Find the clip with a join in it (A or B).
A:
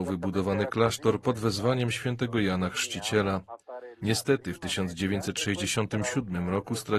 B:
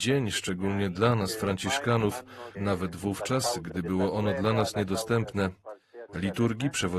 B